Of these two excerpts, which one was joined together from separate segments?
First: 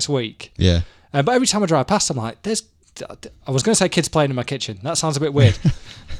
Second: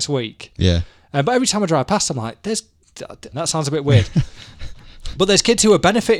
second; 1 cut; at 3.3 s

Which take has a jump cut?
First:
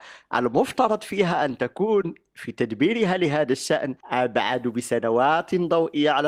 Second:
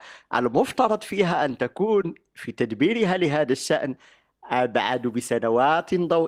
first; 1 cut; at 4.0 s

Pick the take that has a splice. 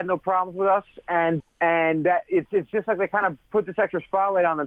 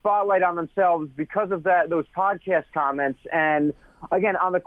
first; 1 cut; at 1.4 s

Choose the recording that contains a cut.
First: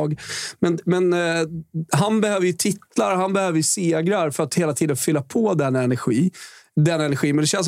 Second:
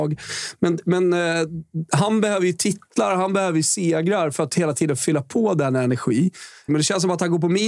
second; 1 cut; at 6.7 s

